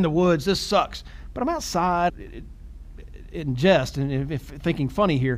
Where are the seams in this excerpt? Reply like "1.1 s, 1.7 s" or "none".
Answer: 2.1 s